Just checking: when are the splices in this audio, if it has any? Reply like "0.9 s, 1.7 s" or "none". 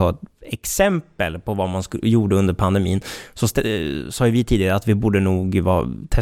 none